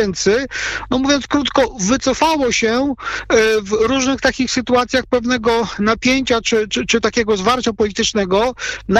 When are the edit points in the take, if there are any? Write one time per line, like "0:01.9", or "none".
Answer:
0:06.7